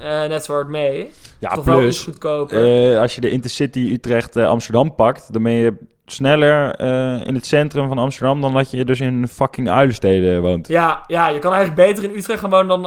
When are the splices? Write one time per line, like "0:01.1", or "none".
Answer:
none